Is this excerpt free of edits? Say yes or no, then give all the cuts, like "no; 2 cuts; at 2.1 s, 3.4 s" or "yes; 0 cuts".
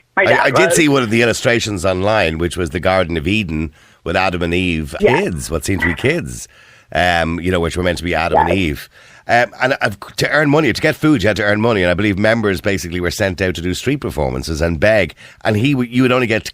no; 1 cut; at 5.0 s